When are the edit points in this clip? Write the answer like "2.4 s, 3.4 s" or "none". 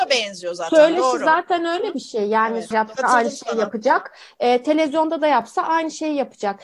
2.7 s